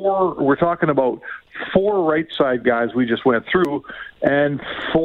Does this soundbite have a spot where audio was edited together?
no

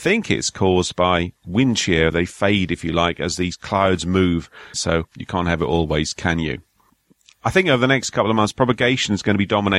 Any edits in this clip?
yes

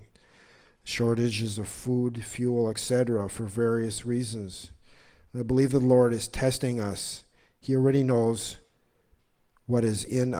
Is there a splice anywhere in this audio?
no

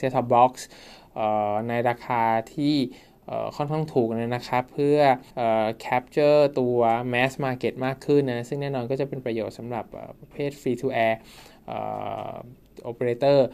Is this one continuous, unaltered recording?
no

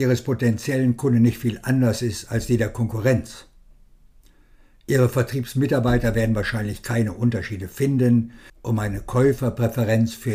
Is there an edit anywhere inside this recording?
yes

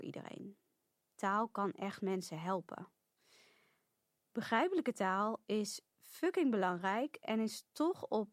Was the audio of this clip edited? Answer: yes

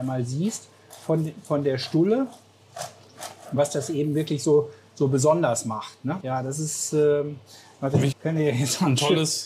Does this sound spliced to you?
yes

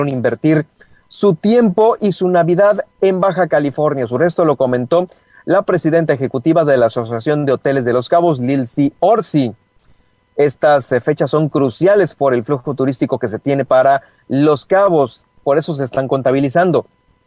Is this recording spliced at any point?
yes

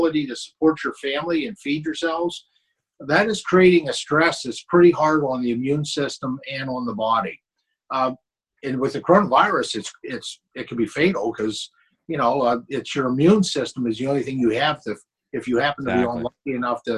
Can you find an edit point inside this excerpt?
no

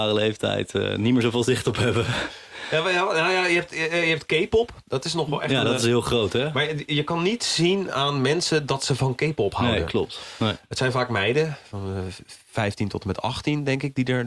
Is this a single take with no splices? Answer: yes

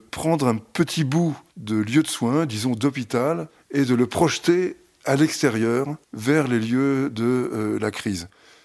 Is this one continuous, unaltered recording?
yes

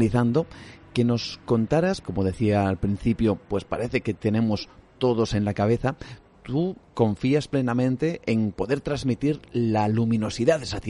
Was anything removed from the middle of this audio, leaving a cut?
yes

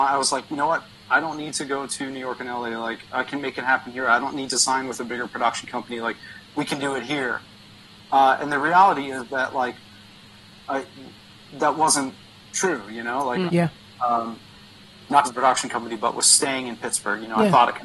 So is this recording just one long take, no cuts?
no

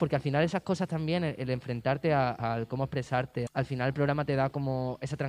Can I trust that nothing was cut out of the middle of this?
no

